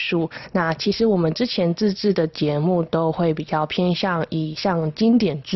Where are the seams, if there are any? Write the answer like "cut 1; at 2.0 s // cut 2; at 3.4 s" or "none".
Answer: none